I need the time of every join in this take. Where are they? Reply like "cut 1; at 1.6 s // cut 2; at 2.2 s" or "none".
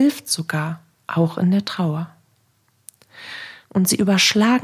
cut 1; at 3.6 s